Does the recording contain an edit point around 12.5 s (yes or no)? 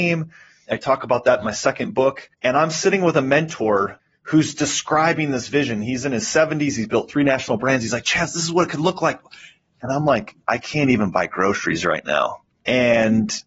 no